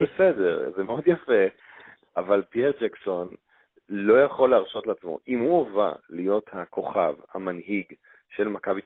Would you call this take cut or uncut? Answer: uncut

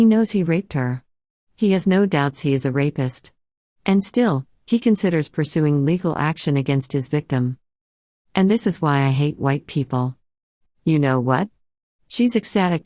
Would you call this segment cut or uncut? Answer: cut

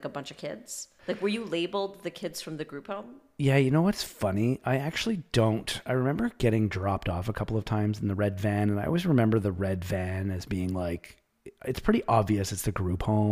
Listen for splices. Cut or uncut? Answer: uncut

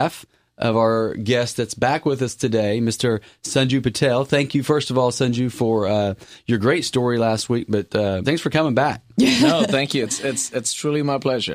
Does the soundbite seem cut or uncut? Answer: cut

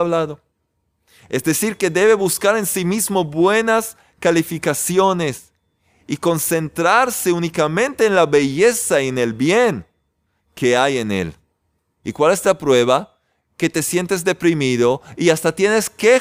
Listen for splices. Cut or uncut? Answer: cut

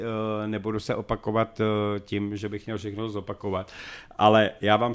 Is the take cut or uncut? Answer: uncut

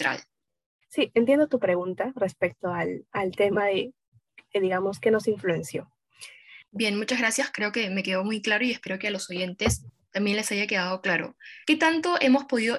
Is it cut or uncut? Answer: cut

